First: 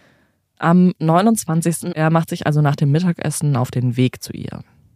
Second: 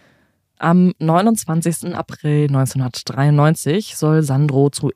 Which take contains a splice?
first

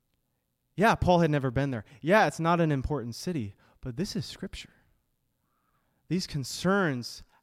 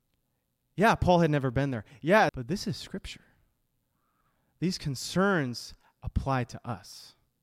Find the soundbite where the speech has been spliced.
second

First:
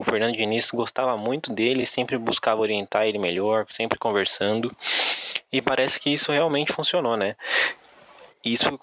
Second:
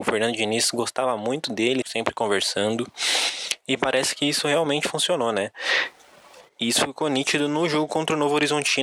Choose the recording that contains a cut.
second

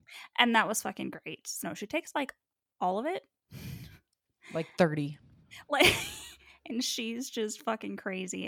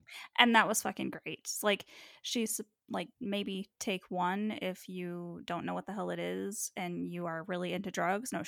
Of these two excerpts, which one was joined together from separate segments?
first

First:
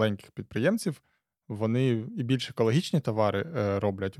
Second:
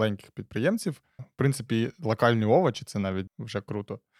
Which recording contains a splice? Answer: second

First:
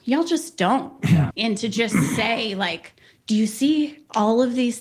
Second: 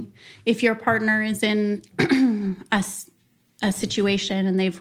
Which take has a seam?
first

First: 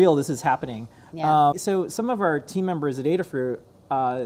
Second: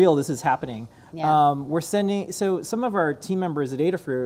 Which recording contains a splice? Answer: first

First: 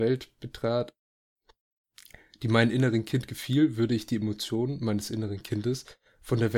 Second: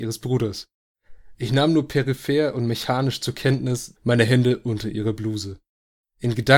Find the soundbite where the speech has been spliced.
second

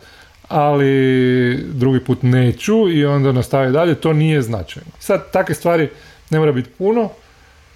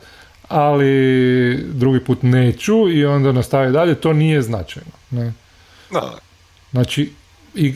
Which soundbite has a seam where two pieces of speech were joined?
first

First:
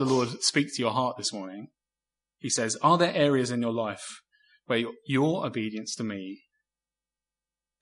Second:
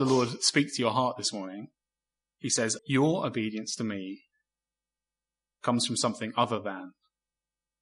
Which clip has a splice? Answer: second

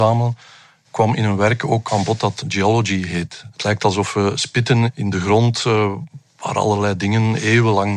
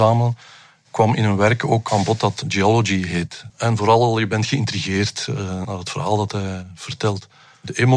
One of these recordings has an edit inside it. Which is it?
second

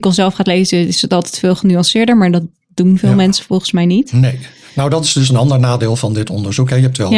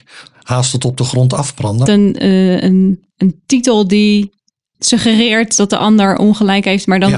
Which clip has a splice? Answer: second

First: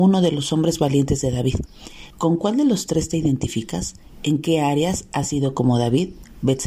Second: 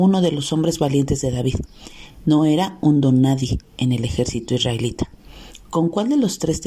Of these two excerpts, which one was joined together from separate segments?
first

